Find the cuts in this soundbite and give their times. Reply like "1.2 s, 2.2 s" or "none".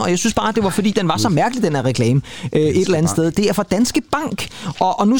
none

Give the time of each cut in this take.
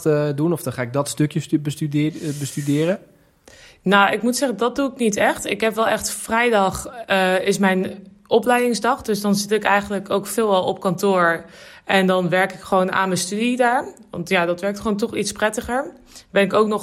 none

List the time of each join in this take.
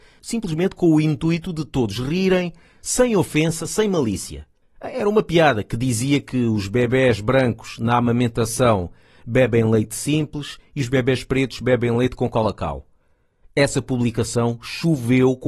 4.6 s

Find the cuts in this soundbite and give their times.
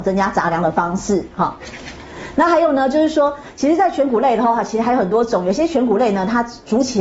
none

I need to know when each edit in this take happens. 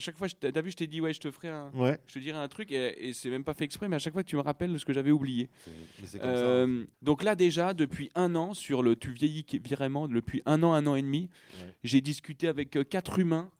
6.9 s

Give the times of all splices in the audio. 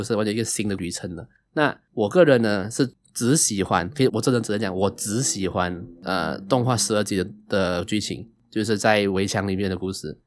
4.1 s

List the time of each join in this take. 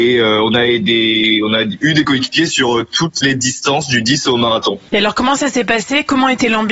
none

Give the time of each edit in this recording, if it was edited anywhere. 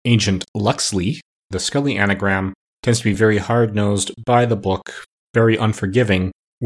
none

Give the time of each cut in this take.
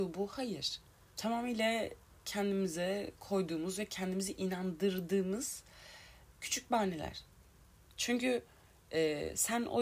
1.1 s, 7.9 s

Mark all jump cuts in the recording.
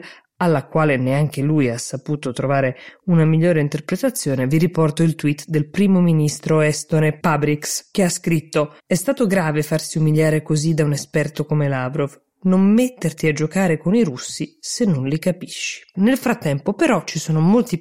8.8 s, 15.9 s

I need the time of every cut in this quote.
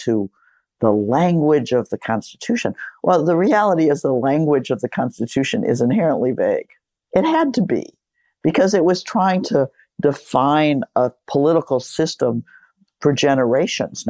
none

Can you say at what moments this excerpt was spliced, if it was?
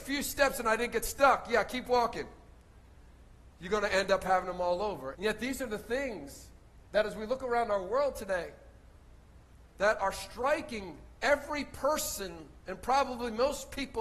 5.1 s

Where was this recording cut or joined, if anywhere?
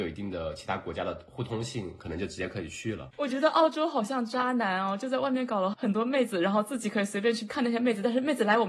3.1 s

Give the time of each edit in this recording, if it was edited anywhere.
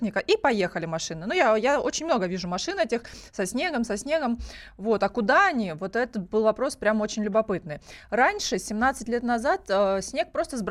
none

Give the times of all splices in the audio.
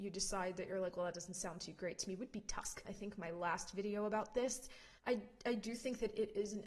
2.8 s, 5.0 s

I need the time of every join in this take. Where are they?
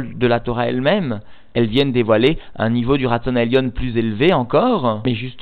none

